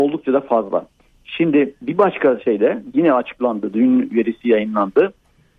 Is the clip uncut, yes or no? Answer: yes